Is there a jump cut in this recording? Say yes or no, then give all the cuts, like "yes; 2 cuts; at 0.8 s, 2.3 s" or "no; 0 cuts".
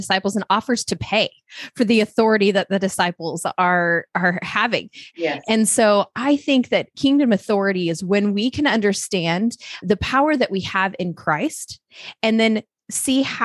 yes; 2 cuts; at 5.1 s, 9.8 s